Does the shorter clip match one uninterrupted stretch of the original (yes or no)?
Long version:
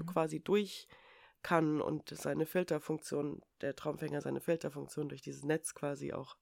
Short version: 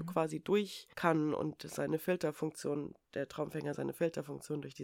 no